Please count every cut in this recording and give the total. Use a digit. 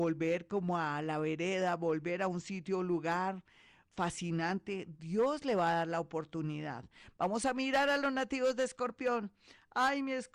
0